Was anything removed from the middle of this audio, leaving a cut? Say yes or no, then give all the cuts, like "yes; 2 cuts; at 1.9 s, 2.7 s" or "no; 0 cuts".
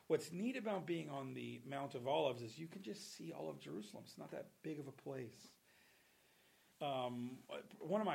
yes; 1 cut; at 6.7 s